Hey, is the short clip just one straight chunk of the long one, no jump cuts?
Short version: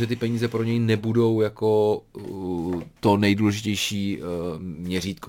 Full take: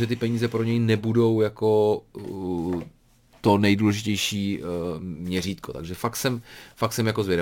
no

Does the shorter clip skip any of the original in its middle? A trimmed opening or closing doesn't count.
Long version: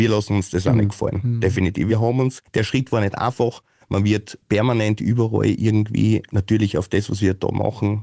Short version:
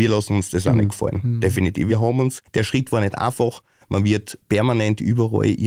no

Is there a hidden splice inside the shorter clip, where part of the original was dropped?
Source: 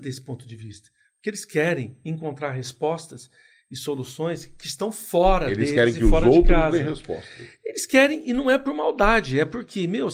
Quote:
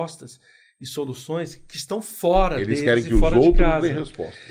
no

